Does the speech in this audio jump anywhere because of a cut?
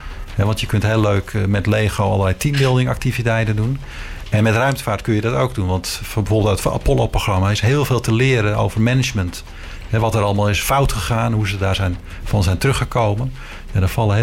no; 0 cuts

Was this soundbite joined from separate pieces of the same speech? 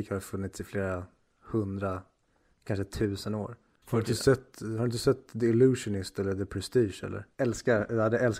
yes; 2 cuts; at 3.8 s, 7.3 s

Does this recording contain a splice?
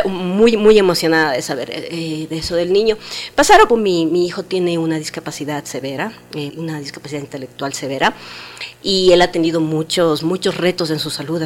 yes; 2 cuts; at 3.7 s, 6.5 s

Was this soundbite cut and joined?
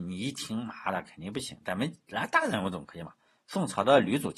no; 0 cuts

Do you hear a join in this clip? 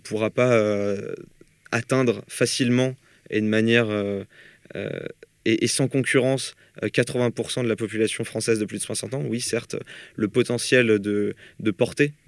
no; 0 cuts

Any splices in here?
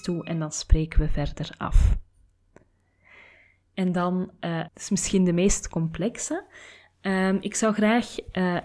yes; 1 cut; at 4.7 s

